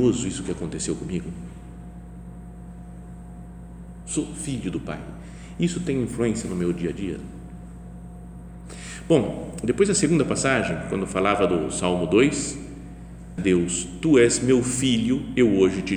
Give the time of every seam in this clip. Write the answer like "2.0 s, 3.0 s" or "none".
13.4 s